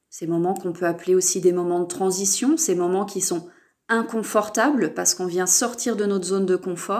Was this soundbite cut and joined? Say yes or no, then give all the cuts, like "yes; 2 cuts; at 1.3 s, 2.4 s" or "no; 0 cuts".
no; 0 cuts